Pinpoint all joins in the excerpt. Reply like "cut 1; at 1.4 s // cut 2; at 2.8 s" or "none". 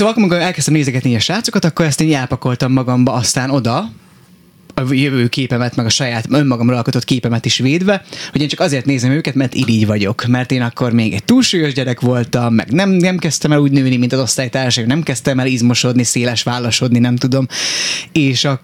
none